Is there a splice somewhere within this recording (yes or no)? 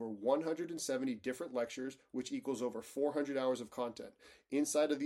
no